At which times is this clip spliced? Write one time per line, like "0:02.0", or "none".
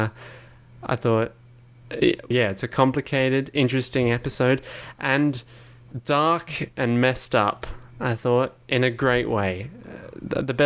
0:02.3